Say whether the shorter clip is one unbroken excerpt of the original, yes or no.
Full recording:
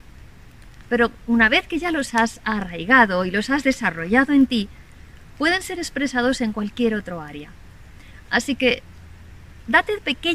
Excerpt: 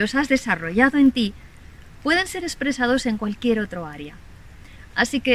yes